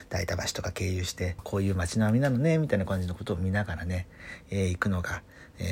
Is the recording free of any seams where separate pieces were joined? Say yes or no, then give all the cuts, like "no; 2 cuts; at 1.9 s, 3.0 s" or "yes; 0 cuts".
no; 1 cut; at 1.4 s